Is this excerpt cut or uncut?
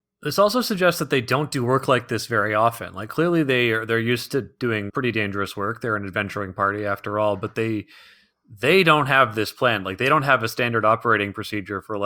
cut